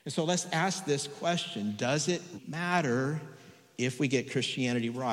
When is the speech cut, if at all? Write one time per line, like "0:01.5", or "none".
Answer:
0:02.4

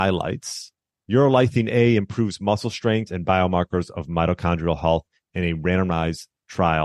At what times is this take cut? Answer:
0:00.9
0:03.1

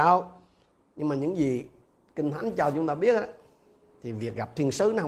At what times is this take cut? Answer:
none

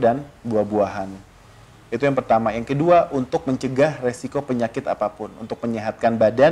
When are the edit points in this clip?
none

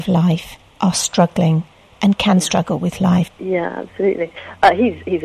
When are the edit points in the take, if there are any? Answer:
0:03.3

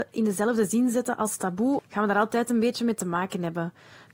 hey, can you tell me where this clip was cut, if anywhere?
0:01.8

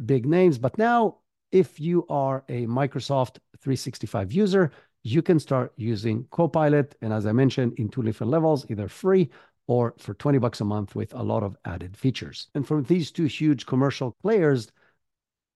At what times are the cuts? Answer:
none

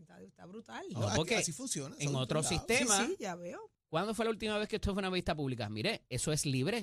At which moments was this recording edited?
0:03.7

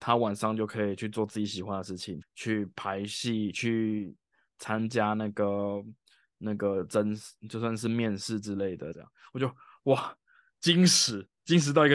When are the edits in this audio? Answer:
0:02.2
0:08.9

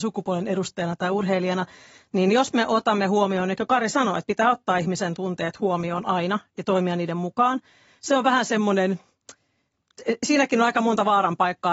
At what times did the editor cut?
none

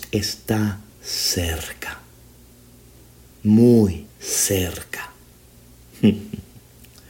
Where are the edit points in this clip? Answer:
0:04.1

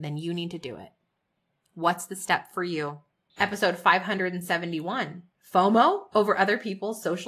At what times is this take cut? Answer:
0:03.3

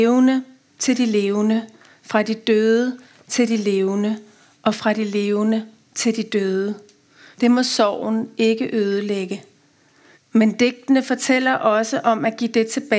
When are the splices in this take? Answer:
0:07.3
0:10.1

